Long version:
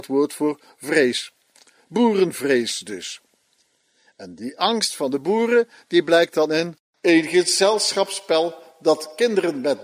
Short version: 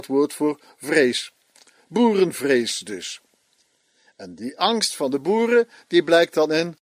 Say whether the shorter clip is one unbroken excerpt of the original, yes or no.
yes